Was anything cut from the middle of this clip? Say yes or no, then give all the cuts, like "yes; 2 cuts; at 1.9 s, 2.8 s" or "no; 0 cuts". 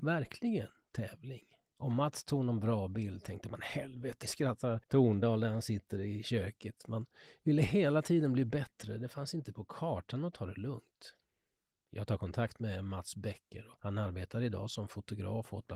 yes; 1 cut; at 4.2 s